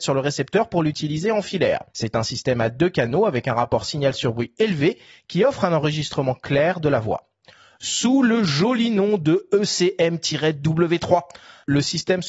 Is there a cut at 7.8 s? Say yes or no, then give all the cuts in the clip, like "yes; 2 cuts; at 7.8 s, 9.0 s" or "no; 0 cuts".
yes; 2 cuts; at 1.9 s, 7.8 s